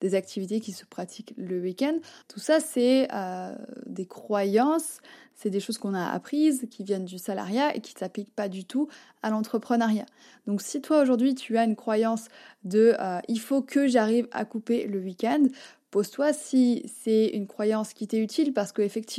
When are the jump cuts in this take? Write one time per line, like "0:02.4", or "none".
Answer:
0:02.2